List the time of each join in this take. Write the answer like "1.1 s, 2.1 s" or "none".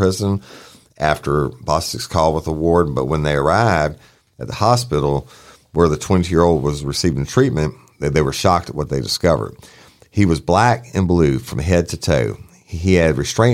none